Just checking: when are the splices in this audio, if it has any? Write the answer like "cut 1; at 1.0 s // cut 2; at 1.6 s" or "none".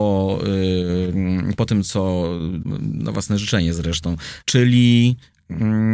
cut 1; at 2.6 s // cut 2; at 4.4 s